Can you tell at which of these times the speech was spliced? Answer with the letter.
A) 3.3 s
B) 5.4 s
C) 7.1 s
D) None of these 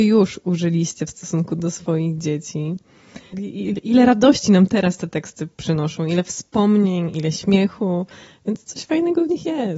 A